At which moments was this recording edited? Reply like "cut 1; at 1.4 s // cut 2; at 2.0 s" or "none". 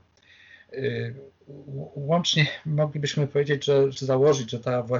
cut 1; at 3.9 s